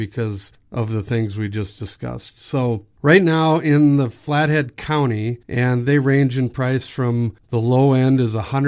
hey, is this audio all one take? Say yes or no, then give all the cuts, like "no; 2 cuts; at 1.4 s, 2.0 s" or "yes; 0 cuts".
no; 1 cut; at 5.4 s